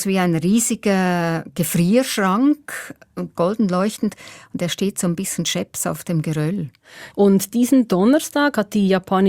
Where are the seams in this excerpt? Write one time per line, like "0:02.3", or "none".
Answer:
0:03.3
0:07.1